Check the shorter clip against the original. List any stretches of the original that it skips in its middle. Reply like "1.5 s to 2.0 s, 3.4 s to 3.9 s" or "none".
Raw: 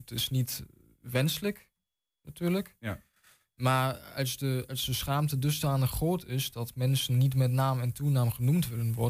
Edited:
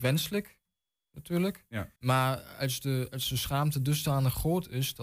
3.1 s to 3.5 s

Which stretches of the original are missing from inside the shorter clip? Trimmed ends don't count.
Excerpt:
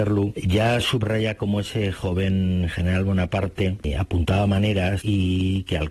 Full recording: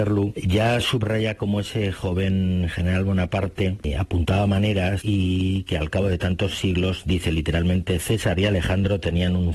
none

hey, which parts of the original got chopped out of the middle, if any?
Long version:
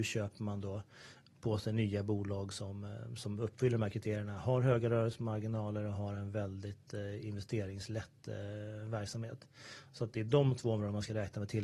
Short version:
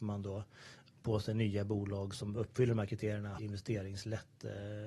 2.5 s to 3.2 s, 4.4 s to 7.2 s

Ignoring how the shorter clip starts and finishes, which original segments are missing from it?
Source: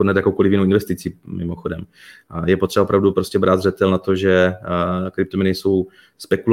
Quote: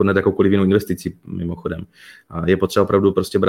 none

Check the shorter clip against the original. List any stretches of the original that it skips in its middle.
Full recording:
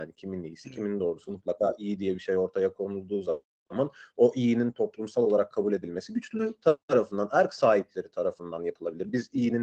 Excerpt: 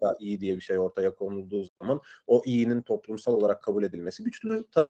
3.2 s to 3.5 s

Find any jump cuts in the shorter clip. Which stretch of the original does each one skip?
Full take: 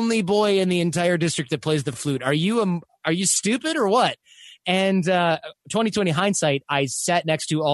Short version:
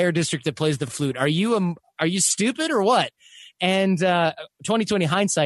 none

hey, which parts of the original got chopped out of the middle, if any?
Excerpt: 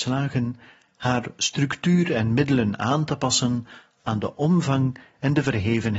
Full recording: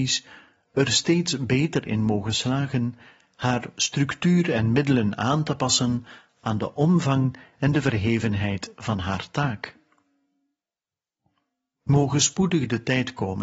none

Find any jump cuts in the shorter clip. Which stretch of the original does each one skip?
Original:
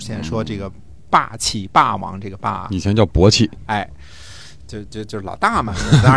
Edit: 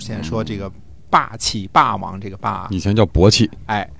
none

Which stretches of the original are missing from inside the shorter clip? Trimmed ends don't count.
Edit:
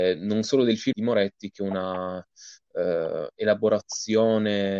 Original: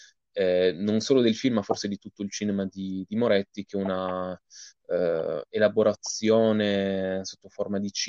1.5 s to 3.1 s

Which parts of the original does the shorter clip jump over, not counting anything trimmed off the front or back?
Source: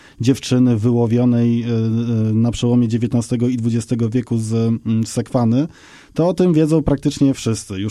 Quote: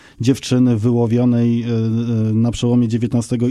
none

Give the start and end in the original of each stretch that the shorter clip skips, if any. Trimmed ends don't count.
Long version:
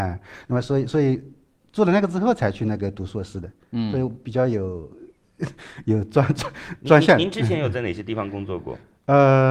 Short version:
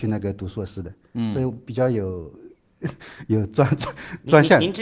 none

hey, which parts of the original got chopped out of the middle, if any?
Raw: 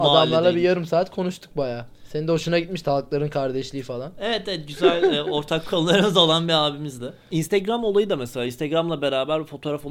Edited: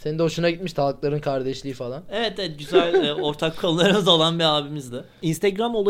none

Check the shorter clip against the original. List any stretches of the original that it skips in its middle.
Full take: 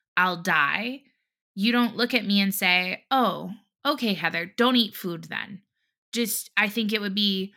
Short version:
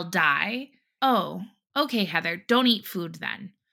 1.3 s to 3.1 s

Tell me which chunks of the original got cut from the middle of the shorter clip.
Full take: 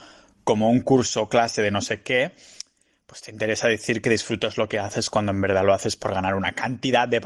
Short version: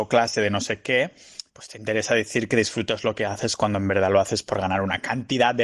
2.7 s to 3.0 s

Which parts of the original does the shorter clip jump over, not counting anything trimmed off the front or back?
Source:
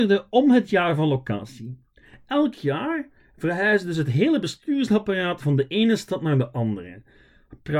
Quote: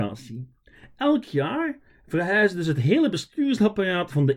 none

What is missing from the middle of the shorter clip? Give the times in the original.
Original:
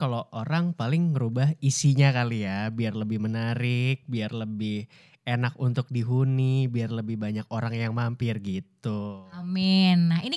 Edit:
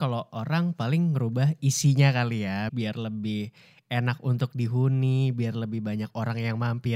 2.7 s to 4.0 s

